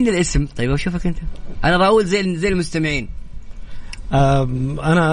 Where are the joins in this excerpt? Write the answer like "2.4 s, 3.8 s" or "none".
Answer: none